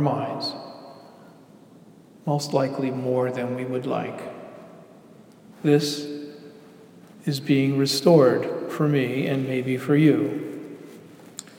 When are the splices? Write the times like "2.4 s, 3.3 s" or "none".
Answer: 5.5 s